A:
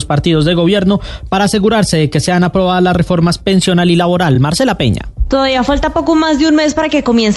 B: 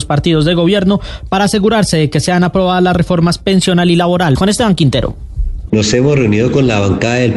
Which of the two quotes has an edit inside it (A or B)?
B